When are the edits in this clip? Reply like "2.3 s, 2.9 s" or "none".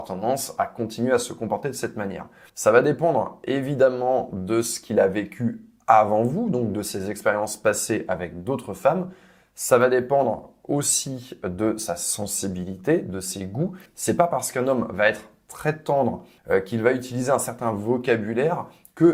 2.5 s, 13.9 s, 16.4 s

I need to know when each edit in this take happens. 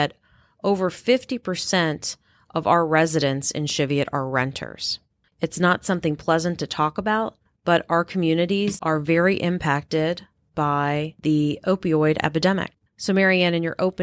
5.3 s, 12.9 s

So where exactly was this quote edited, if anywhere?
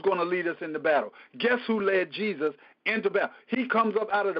none

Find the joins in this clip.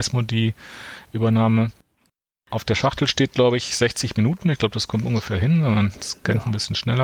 2.3 s

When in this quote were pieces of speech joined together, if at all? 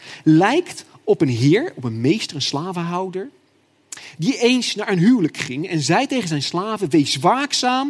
none

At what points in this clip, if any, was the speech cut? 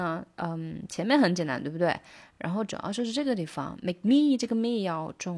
none

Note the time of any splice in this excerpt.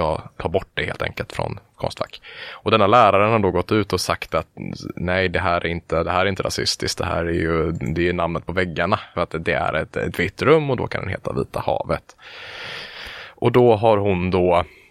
none

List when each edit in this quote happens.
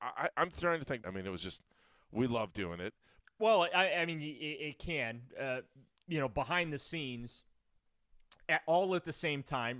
1.0 s, 3.2 s, 8.5 s

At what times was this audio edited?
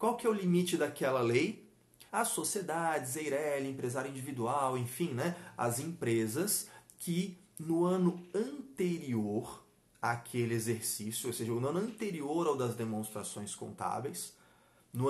2.1 s

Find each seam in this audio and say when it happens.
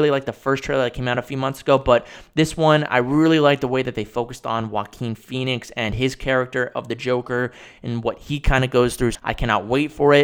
9.1 s

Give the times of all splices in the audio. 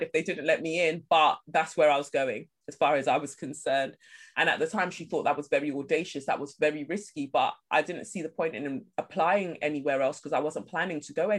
4.3 s

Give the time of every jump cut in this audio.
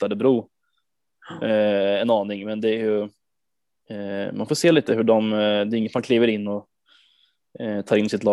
none

